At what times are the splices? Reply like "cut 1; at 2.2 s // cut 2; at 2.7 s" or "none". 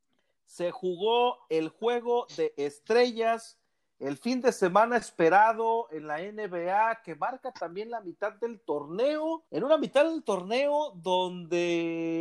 cut 1; at 9.5 s